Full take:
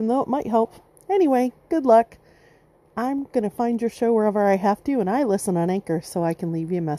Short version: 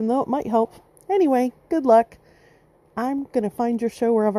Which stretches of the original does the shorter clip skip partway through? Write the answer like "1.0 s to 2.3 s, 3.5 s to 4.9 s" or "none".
none